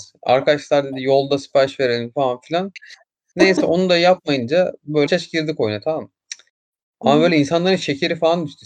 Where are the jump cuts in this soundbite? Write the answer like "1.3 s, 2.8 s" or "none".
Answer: 5.1 s